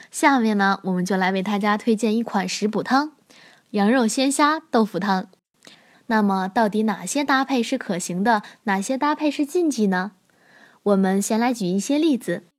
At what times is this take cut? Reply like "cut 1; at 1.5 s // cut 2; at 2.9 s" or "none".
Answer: cut 1; at 5.9 s